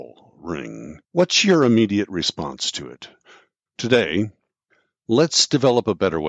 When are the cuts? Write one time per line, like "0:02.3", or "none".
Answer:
0:01.0
0:03.7